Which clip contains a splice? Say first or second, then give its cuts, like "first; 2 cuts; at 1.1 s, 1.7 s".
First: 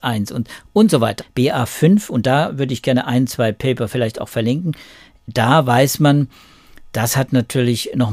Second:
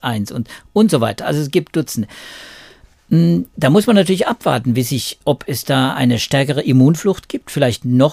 first; 1 cut; at 1.2 s